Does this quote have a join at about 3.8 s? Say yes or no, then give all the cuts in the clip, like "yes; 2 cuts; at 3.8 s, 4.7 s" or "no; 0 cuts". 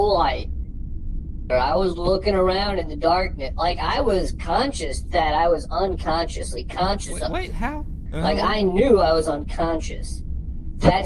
no; 2 cuts; at 1.5 s, 8.1 s